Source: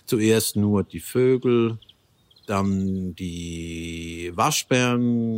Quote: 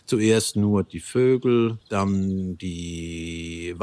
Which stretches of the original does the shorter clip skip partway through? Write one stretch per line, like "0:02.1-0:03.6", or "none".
0:01.8-0:02.4